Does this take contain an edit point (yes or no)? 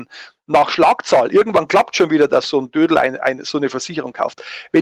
no